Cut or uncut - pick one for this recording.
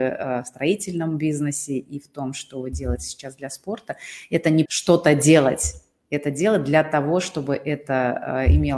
cut